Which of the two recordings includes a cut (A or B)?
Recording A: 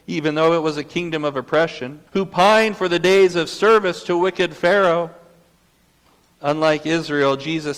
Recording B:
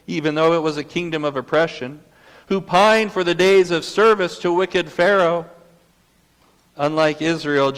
A